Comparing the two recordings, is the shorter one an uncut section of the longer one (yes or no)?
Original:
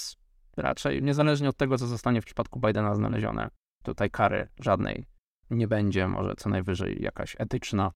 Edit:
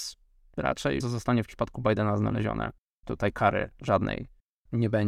no